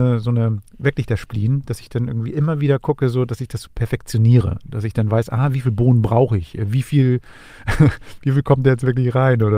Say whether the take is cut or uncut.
uncut